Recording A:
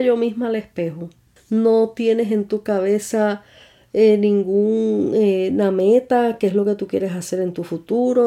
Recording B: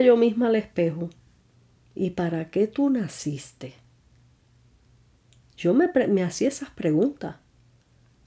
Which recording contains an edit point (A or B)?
A